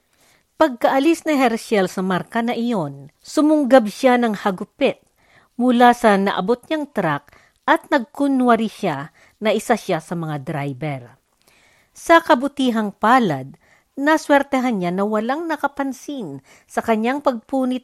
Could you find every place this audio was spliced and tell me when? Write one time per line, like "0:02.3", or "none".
0:03.1